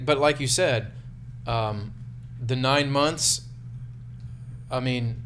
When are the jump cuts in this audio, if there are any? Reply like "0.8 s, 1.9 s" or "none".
none